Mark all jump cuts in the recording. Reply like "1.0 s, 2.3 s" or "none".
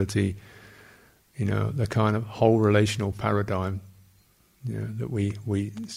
none